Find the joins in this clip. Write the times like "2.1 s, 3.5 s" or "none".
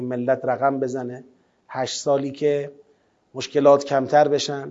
none